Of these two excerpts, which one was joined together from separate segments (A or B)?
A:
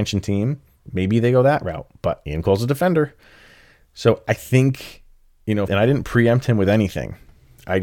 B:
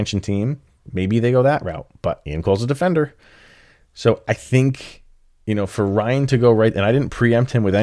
A